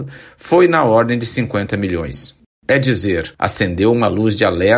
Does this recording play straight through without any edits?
yes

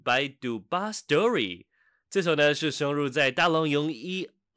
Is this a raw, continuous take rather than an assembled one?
yes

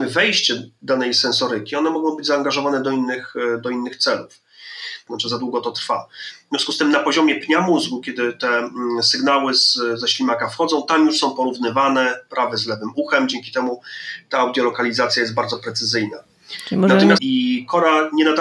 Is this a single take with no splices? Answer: no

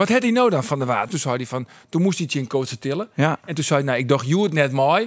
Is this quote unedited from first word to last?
no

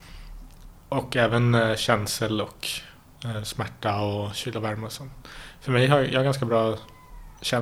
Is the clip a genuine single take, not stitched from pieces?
yes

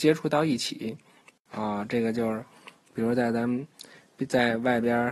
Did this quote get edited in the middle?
yes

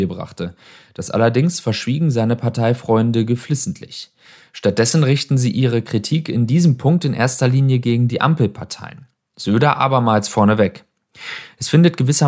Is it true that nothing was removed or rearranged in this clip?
yes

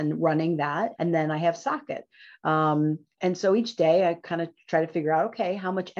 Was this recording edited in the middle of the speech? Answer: yes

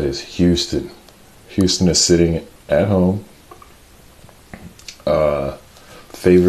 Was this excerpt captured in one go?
yes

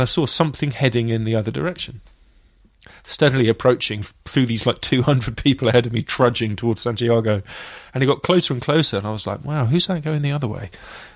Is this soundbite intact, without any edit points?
yes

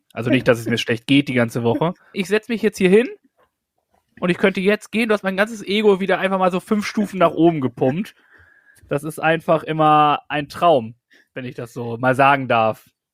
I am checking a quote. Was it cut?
yes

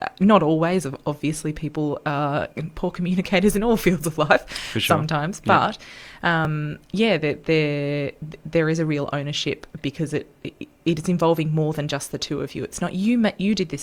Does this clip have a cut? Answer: no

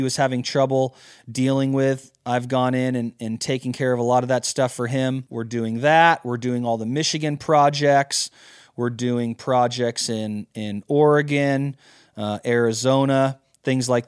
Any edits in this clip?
no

